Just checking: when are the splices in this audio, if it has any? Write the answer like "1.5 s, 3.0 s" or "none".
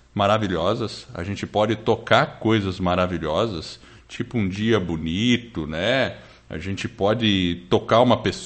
none